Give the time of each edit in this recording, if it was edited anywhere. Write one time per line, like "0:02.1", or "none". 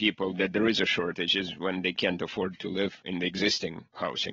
none